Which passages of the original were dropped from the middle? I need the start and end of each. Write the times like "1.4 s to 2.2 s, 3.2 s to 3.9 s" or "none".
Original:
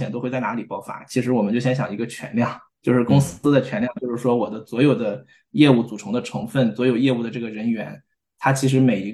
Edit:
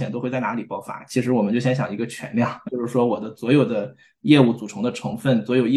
2.6 s to 3.9 s